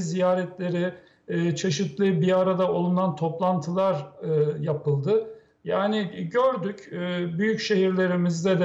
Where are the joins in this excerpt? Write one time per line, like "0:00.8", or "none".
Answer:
0:05.6